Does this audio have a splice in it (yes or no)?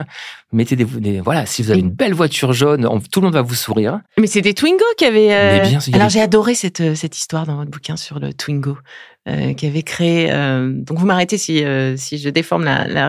no